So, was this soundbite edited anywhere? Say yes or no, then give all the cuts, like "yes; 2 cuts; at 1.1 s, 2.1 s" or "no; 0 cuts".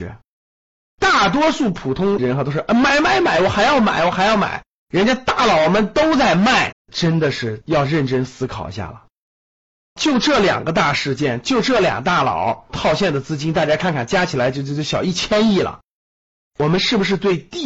yes; 1 cut; at 6.7 s